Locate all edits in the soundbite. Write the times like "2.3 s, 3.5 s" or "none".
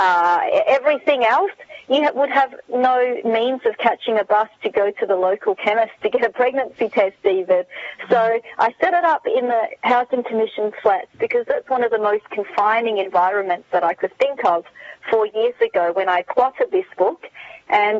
none